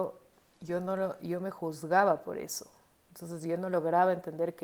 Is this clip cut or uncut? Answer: uncut